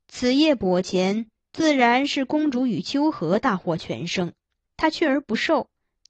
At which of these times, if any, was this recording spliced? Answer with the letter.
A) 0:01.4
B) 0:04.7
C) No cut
B